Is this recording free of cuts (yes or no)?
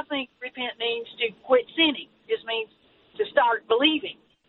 no